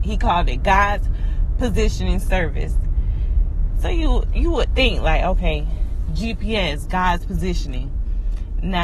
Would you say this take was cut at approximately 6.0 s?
no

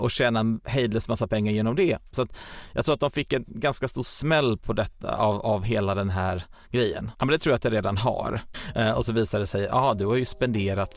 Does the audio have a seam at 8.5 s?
yes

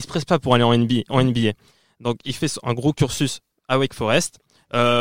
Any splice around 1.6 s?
no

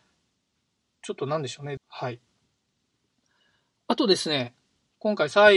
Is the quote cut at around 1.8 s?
yes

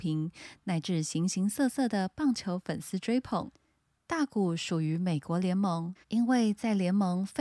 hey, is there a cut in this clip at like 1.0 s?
no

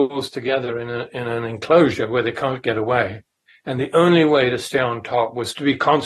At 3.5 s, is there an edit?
yes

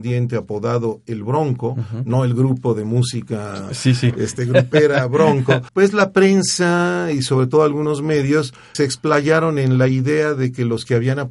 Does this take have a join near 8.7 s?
yes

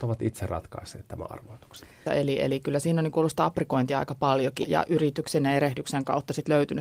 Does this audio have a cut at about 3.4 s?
no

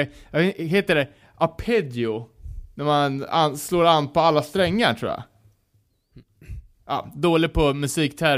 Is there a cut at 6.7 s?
no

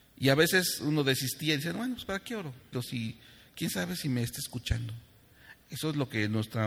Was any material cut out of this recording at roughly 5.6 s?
no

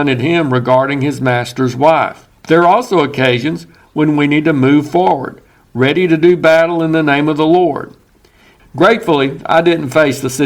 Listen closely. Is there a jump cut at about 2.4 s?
yes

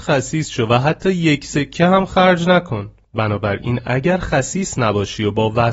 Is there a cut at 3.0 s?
yes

